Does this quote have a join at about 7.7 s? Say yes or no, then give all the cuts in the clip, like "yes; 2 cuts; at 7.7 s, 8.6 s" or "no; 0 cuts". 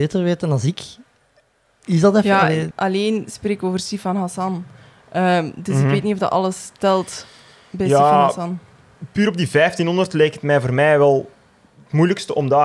no; 1 cut; at 2.7 s